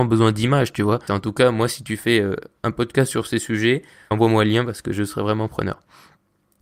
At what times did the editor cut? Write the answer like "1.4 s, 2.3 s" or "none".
1.1 s, 4.1 s

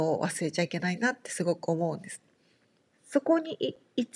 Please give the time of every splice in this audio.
2.9 s

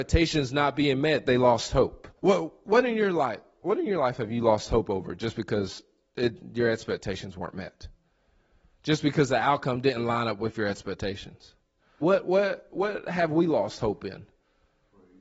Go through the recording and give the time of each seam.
2.2 s, 12.0 s

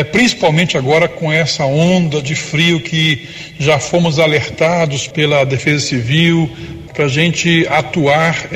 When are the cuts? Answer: 5.1 s, 6.9 s

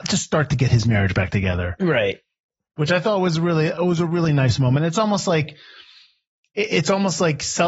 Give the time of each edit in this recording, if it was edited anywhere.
none

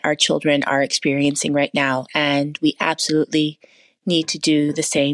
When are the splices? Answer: none

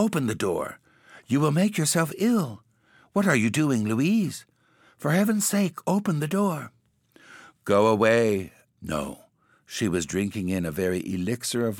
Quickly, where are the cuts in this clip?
8.7 s

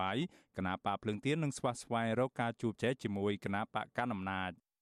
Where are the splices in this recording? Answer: 2.8 s

